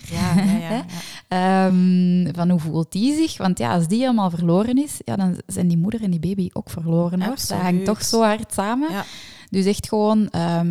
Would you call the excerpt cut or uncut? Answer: uncut